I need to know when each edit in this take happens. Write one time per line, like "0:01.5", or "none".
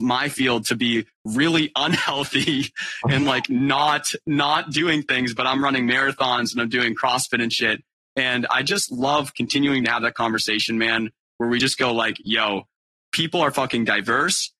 none